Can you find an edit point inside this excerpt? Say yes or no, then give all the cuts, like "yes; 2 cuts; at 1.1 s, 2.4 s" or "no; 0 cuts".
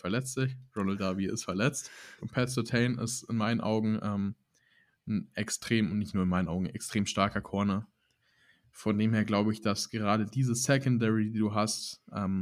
yes; 1 cut; at 2.2 s